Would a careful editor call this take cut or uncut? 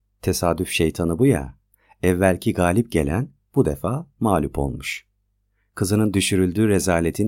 uncut